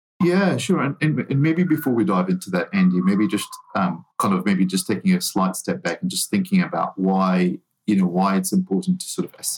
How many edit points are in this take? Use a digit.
1